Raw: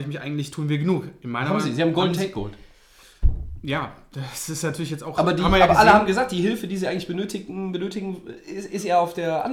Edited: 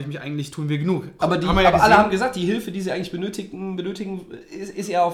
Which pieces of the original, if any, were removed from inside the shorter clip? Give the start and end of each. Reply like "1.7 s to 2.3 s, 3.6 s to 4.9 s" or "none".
1.2 s to 5.1 s